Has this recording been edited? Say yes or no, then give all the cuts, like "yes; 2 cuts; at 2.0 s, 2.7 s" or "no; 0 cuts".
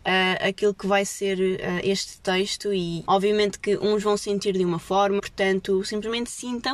yes; 2 cuts; at 3.1 s, 5.2 s